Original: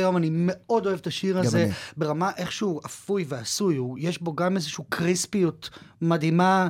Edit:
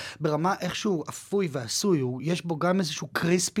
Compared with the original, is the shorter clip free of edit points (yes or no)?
yes